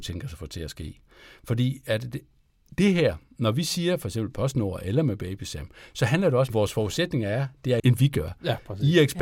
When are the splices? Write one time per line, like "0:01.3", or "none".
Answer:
0:06.5
0:07.8

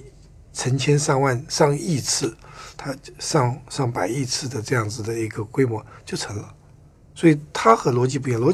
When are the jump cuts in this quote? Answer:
none

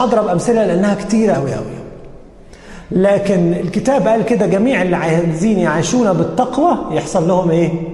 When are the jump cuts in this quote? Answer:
0:01.3

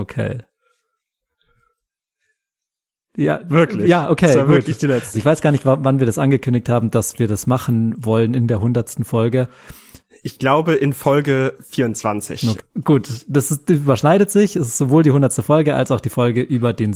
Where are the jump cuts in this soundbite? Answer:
0:05.1
0:12.6

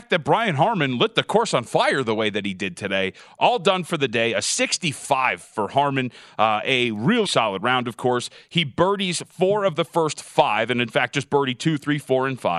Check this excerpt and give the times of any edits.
0:07.2

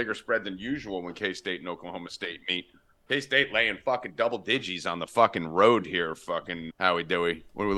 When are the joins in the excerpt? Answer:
0:06.7

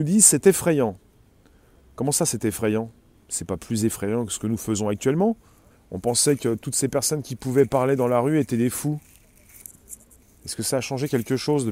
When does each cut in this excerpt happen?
0:05.7

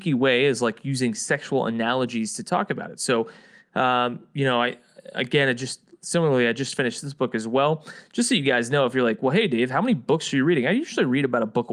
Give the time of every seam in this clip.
none

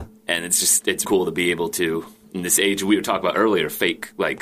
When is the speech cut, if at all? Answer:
0:01.0

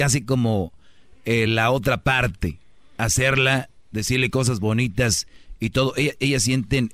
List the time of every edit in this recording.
none

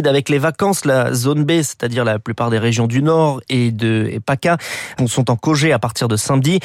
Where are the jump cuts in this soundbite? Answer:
0:05.0

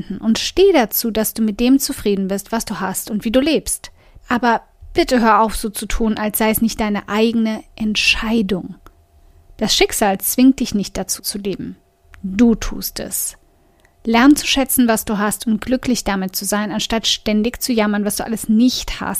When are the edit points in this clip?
0:04.2
0:11.2

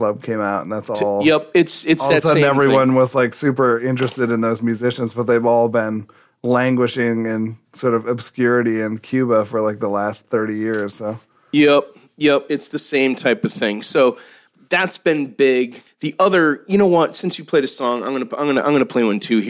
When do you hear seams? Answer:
none

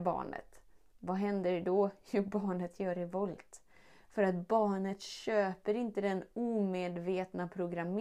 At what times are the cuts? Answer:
none

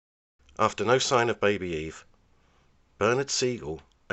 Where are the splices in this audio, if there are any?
none

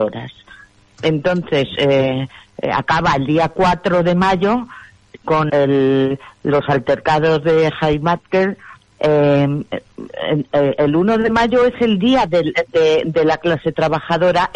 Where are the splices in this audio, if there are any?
0:05.5
0:08.9

